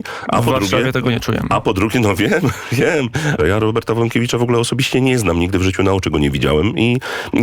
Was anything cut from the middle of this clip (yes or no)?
yes